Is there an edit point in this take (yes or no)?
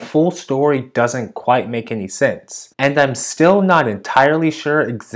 yes